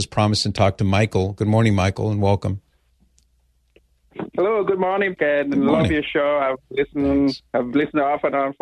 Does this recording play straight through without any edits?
no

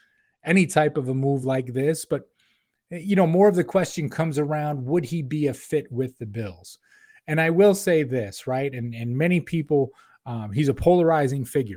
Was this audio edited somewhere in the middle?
no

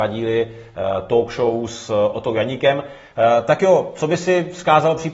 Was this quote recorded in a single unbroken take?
yes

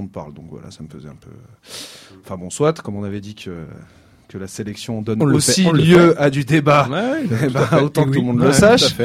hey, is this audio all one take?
yes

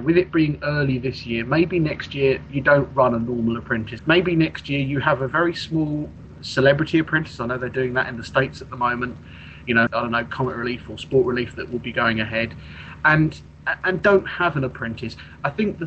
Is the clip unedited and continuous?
no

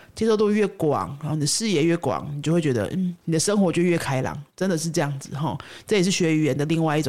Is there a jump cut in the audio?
yes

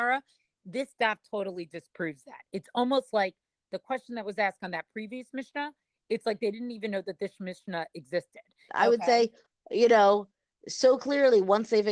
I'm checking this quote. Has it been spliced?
yes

